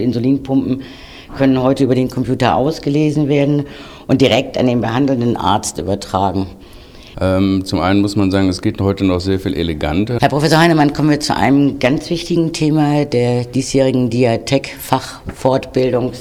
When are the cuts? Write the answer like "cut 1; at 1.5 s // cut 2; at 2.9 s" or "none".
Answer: cut 1; at 7.1 s // cut 2; at 10.2 s